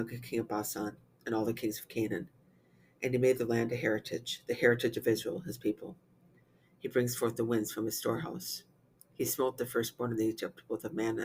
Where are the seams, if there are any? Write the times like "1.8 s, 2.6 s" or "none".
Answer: 6.6 s